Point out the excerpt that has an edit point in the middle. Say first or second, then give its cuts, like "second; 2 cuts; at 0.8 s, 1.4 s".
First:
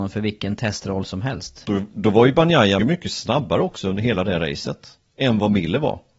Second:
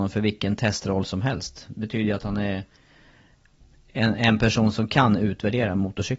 first; 2 cuts; at 1.6 s, 2.8 s